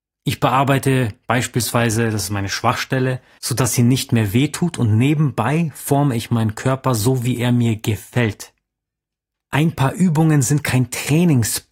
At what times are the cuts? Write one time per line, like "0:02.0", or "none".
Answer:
0:03.4
0:09.3